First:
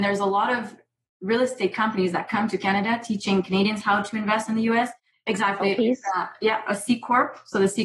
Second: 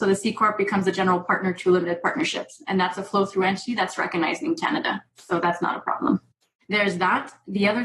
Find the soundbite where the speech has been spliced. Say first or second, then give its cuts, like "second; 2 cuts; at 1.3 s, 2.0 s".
first; 1 cut; at 5.1 s